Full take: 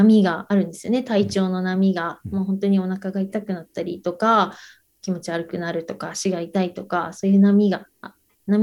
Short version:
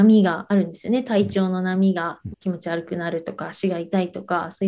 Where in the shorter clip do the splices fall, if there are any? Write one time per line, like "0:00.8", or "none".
0:02.3